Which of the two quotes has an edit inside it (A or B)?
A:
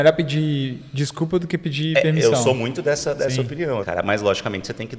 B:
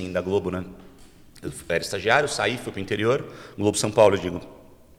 A